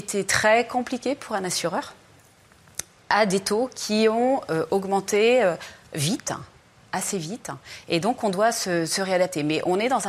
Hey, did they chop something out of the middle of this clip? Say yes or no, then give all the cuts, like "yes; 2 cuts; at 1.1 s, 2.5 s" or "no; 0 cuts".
no; 0 cuts